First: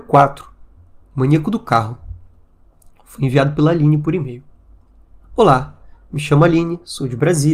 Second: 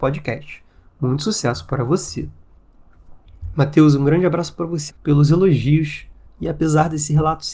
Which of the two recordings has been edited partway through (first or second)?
second